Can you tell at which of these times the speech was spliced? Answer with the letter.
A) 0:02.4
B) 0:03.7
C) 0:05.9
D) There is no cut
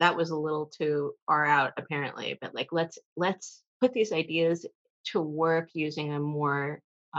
B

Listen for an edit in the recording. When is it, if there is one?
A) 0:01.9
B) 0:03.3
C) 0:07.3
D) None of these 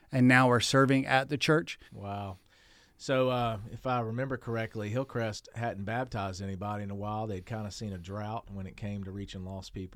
A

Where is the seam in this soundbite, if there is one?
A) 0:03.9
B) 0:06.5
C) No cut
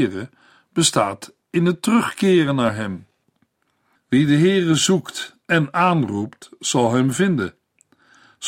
C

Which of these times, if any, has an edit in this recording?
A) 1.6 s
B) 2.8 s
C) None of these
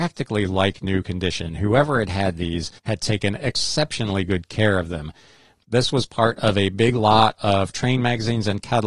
B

